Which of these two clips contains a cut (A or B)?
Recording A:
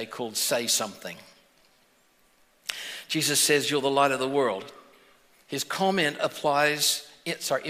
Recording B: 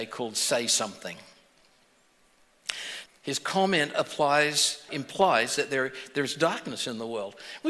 B